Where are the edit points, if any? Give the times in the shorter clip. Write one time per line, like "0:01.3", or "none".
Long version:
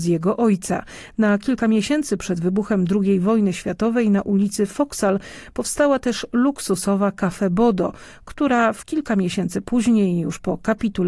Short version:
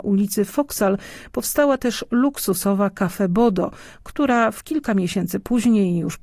none